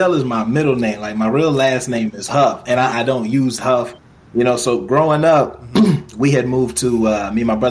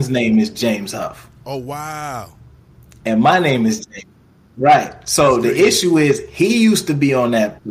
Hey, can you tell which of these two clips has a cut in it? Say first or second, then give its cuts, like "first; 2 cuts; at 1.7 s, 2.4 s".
first; 1 cut; at 2.9 s